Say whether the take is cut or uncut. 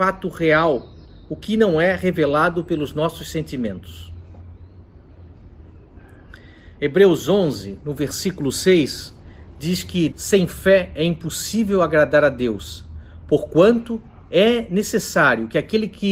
cut